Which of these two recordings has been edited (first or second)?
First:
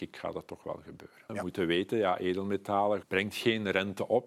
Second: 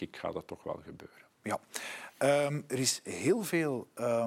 first